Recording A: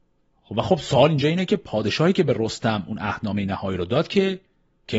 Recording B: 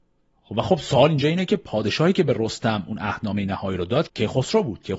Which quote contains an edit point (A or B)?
B